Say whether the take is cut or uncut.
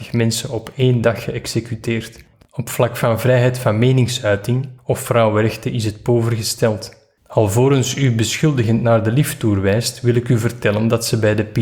cut